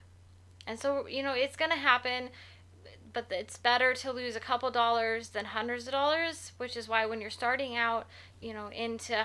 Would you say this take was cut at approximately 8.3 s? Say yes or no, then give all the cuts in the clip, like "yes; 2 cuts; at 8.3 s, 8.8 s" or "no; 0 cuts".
yes; 1 cut; at 8.3 s